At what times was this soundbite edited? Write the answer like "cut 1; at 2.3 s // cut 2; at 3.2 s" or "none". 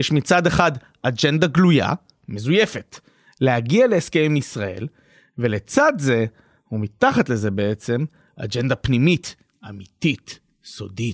none

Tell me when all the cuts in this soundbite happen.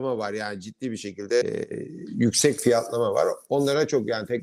cut 1; at 1.4 s

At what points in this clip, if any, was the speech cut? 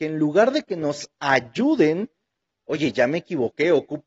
none

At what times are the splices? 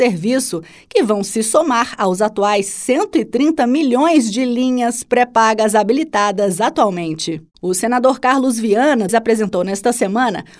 cut 1; at 7.5 s // cut 2; at 9.1 s

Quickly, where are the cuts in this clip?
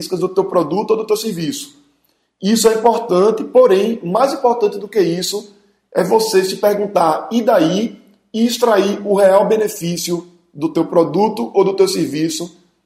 none

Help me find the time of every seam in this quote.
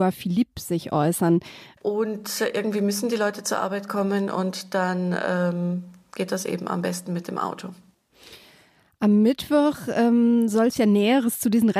cut 1; at 1.8 s

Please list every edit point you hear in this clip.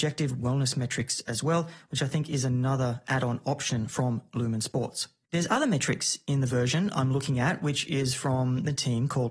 cut 1; at 5.2 s

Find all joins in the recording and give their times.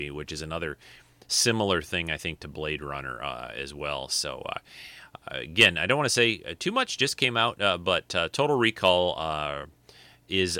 none

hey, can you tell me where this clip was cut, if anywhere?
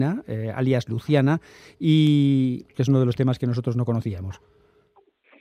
cut 1; at 2.7 s

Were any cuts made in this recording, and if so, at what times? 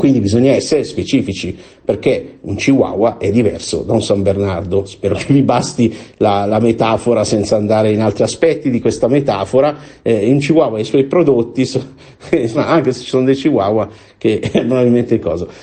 cut 1; at 12.5 s

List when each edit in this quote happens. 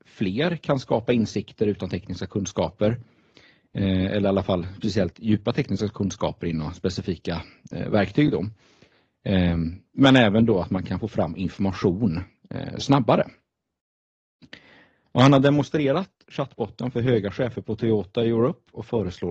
none

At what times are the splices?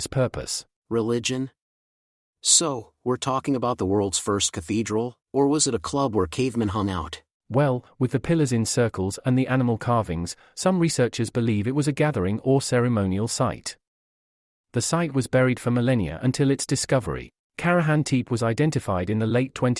cut 1; at 5.2 s // cut 2; at 14.6 s // cut 3; at 17.4 s

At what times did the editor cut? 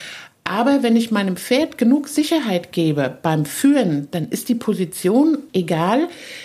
cut 1; at 5.5 s

